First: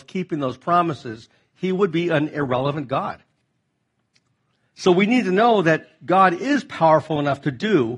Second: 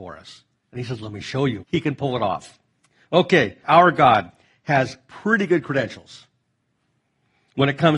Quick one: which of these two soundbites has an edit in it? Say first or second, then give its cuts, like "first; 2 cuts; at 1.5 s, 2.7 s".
second; 2 cuts; at 1.6 s, 3.6 s